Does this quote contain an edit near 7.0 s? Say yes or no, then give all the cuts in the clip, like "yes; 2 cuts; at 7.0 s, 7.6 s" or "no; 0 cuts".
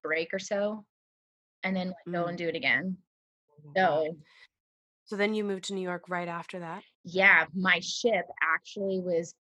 no; 0 cuts